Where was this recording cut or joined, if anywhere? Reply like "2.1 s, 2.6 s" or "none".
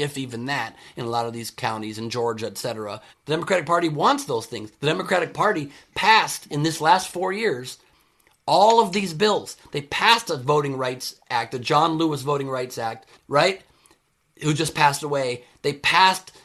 3.1 s, 13.1 s